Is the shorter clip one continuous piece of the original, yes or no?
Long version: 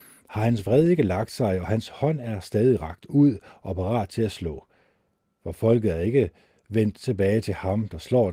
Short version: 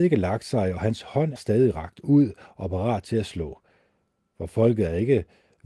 no